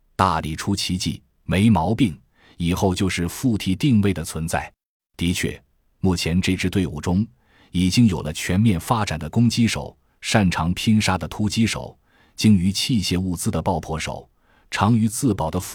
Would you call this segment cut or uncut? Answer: cut